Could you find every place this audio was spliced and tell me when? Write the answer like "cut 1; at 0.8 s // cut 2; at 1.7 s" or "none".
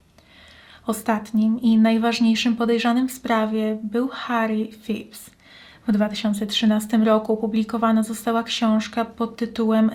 none